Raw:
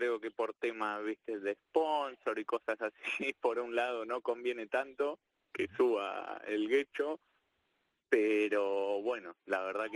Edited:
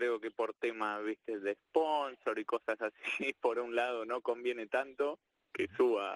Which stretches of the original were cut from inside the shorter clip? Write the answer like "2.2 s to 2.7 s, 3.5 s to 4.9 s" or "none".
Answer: none